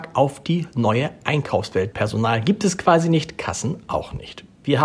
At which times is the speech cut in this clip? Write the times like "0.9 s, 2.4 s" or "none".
1.9 s